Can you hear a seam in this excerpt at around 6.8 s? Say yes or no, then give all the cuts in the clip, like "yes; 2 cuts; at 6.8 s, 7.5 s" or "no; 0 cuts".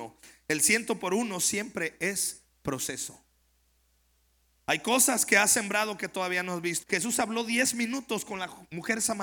yes; 1 cut; at 6.8 s